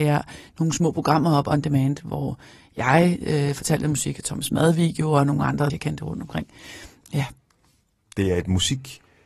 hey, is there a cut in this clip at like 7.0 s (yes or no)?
yes